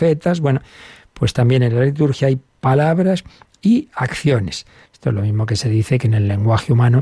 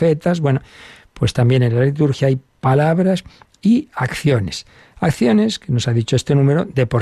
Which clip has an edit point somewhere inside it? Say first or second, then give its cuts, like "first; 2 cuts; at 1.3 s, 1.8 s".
first; 1 cut; at 4.9 s